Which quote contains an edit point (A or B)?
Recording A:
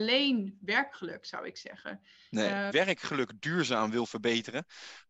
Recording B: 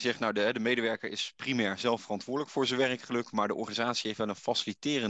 A